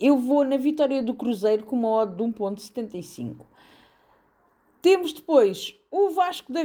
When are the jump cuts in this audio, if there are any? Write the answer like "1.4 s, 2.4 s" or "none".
none